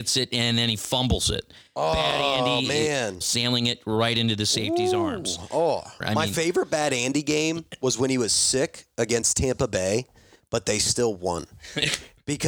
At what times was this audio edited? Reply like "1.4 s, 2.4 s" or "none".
3.2 s, 6.0 s